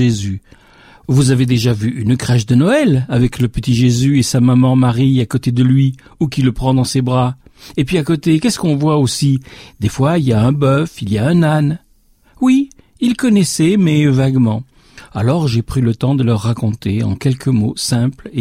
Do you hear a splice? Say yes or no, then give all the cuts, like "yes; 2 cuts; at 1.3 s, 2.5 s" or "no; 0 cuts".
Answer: no; 0 cuts